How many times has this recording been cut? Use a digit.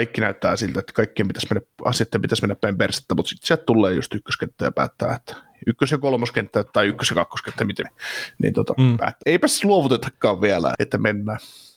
3